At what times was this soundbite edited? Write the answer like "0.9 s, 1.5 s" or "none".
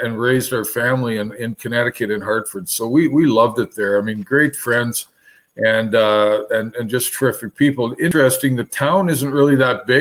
none